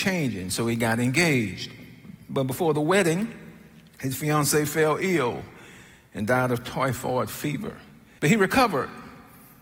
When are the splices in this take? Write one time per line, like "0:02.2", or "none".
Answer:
0:08.2